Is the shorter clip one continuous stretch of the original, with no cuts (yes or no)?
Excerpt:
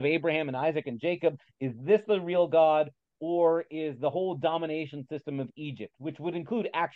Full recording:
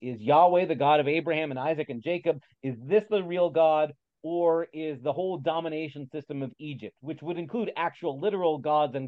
yes